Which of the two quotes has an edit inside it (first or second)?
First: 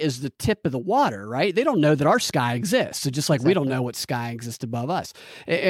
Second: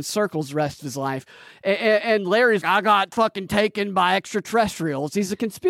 second